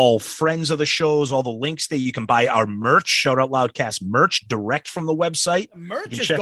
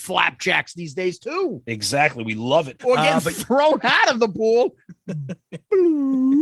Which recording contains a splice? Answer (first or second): second